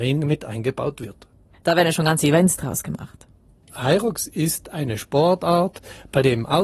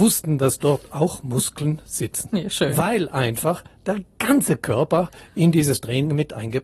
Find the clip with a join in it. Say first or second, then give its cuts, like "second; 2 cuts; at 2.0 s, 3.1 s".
first; 1 cut; at 1.5 s